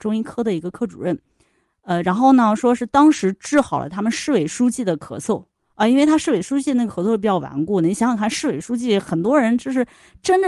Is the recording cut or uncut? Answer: uncut